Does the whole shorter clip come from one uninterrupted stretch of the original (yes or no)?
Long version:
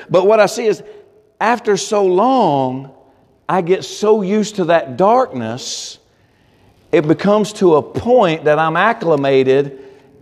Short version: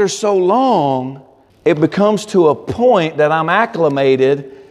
no